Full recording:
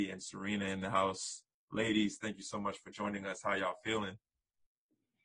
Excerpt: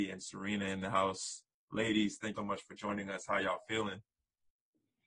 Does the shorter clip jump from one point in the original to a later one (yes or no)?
yes